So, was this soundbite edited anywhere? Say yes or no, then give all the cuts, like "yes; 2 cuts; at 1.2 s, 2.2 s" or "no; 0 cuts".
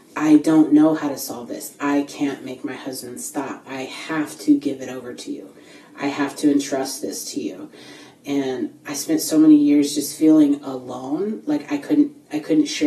no; 0 cuts